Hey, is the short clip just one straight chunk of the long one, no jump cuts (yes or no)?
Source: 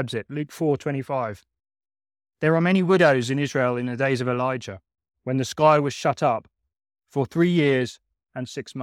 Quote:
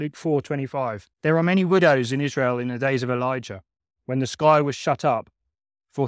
no